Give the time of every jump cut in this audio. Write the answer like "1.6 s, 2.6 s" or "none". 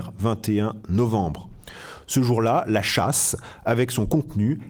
none

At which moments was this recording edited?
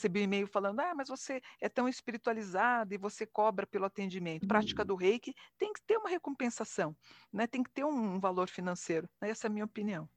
4.4 s

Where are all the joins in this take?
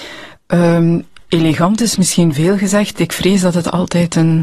none

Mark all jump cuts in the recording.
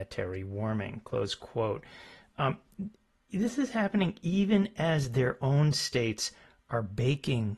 none

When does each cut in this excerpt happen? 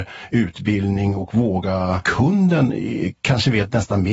2.0 s

